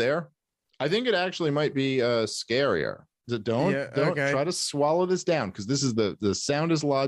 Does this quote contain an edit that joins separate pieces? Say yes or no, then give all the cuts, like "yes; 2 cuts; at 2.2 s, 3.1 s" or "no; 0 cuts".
yes; 1 cut; at 3.2 s